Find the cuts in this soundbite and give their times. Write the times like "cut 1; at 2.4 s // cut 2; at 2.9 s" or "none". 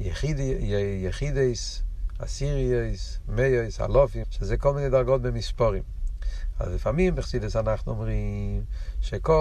cut 1; at 4.2 s